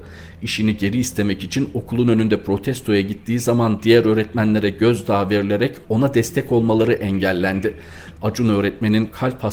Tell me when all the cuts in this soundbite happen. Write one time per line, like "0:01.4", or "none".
0:08.2